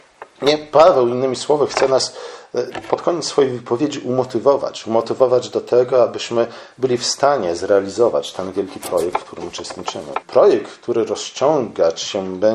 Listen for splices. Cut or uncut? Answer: cut